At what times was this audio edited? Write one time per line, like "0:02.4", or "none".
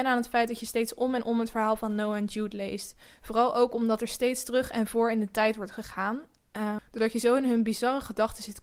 0:06.8